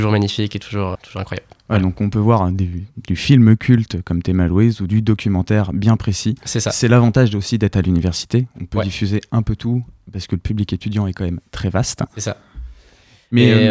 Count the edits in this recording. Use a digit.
1